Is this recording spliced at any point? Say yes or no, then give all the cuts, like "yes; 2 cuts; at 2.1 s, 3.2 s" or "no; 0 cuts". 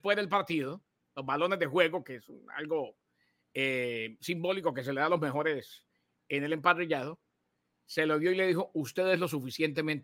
no; 0 cuts